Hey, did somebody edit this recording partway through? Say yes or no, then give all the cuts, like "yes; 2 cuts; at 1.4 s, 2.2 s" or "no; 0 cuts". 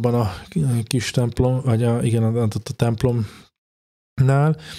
no; 0 cuts